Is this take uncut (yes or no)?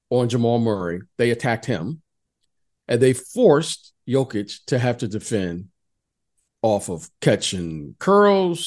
yes